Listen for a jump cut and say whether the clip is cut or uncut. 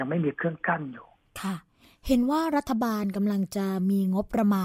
uncut